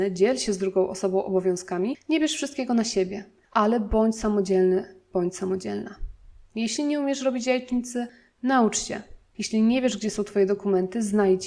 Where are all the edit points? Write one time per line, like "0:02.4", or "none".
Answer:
0:09.3